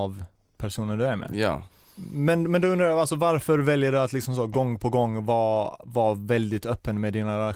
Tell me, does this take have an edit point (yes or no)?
no